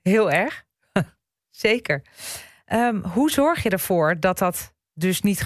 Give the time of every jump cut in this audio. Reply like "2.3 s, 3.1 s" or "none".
none